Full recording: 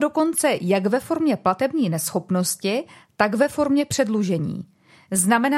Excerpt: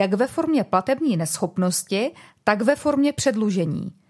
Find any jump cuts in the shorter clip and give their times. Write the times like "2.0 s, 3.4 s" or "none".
none

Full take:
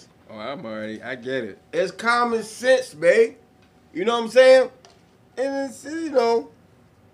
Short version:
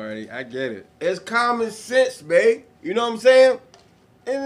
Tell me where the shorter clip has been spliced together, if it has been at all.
2.7 s

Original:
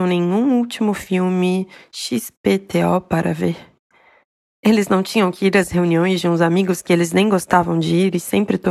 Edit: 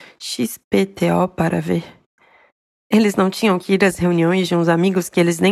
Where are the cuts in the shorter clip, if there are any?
none

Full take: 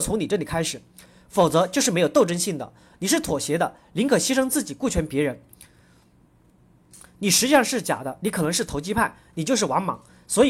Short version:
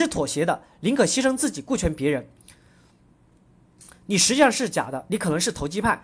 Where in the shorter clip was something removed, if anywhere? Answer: none

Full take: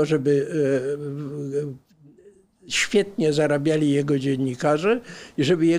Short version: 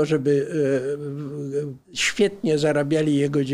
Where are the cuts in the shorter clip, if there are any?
1.8 s

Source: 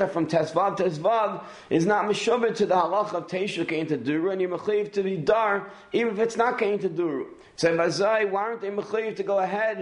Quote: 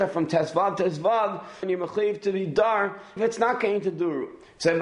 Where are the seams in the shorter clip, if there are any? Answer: 1.6 s, 3.2 s

